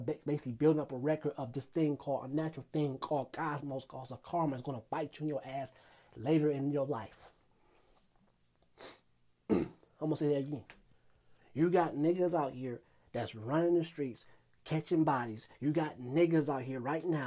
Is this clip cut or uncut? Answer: uncut